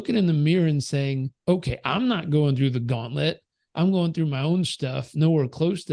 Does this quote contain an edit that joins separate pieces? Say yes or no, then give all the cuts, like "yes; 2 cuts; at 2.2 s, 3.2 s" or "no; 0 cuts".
yes; 1 cut; at 1.4 s